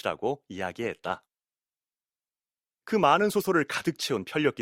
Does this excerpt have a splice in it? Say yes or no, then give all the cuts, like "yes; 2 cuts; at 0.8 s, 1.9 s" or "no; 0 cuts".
no; 0 cuts